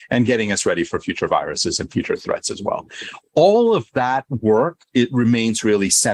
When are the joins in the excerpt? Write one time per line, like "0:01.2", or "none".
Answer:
none